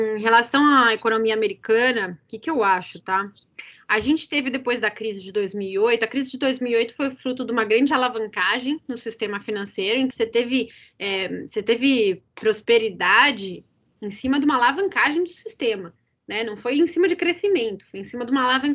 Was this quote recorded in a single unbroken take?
no; 1 cut; at 10.1 s

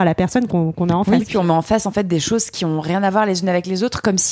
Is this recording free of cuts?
yes; 0 cuts

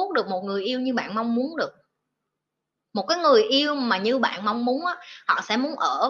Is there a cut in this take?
no; 0 cuts

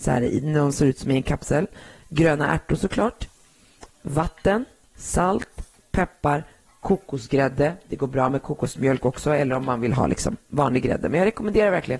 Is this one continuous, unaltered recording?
yes; 0 cuts

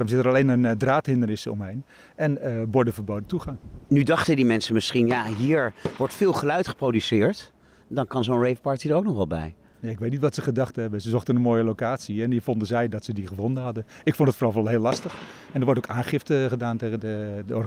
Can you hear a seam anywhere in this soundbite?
no; 0 cuts

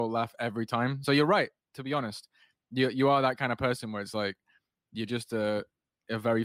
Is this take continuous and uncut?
yes; 0 cuts

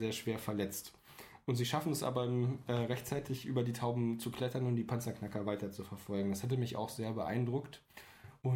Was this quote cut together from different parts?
no; 0 cuts

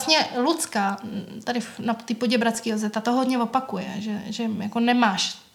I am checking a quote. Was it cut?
no; 0 cuts

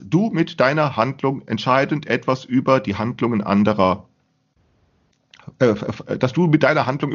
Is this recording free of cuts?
yes; 0 cuts

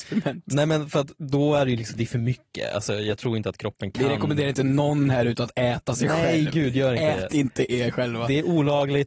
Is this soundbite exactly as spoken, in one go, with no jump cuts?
yes; 0 cuts

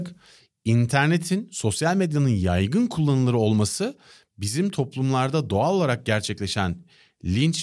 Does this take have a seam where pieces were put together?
no; 0 cuts

